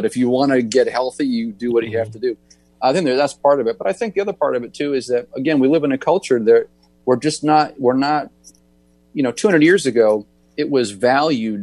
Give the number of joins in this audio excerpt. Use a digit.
1